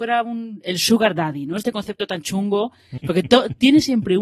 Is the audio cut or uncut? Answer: cut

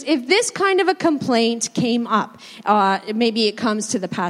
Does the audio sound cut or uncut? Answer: uncut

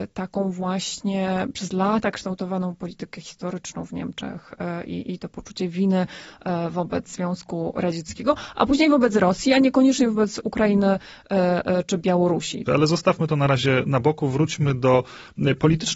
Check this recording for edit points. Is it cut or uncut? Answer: cut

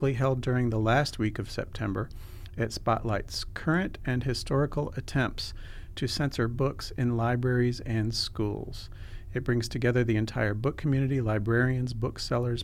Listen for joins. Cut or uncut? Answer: uncut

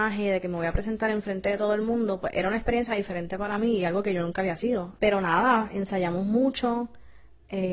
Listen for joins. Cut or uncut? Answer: cut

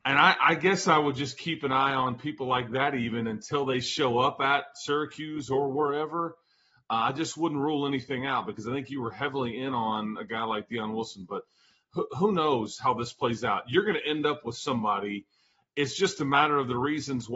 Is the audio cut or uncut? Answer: uncut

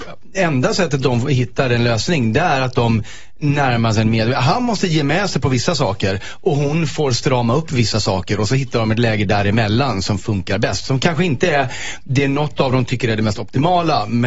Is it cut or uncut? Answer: uncut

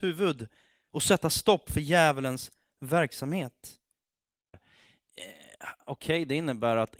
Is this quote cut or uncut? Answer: cut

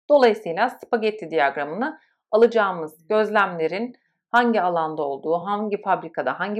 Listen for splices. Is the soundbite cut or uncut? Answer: uncut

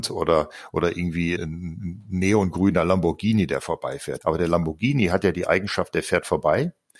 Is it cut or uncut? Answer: cut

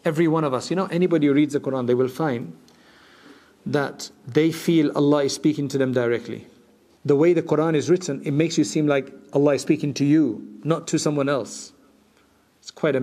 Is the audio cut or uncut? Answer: cut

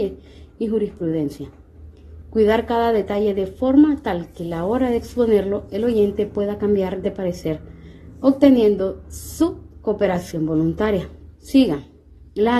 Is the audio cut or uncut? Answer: cut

